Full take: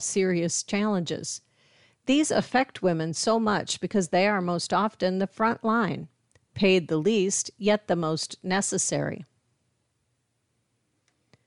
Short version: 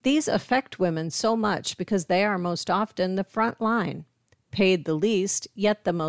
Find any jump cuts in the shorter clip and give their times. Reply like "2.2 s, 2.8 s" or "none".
none